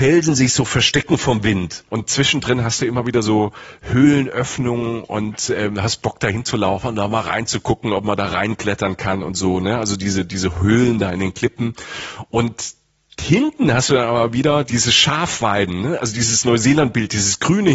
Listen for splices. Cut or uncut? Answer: cut